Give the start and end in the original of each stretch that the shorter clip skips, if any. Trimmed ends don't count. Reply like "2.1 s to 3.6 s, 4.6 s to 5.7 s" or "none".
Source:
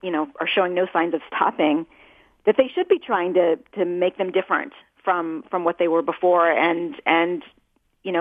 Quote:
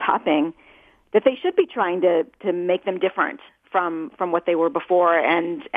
none